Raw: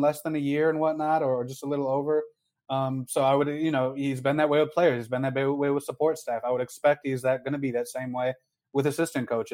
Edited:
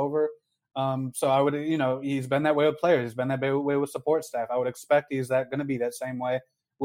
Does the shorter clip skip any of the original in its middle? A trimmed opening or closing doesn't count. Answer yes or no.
no